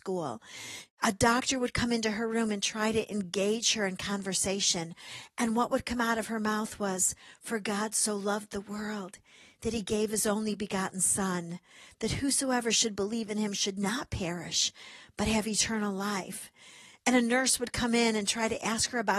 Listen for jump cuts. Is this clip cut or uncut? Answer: uncut